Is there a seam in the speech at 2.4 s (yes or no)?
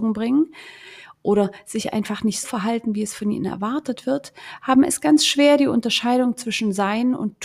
yes